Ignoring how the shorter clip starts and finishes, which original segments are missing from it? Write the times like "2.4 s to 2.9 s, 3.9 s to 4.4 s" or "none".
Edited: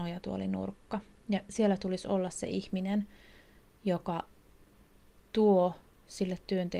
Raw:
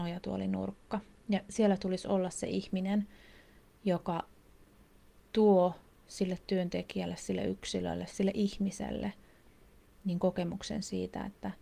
none